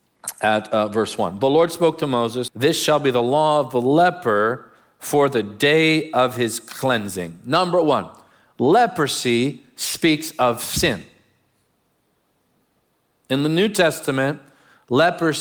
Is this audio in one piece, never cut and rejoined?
no; 1 cut; at 2.5 s

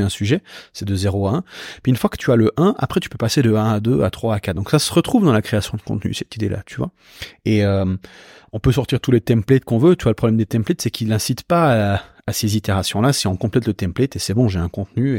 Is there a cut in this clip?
no; 0 cuts

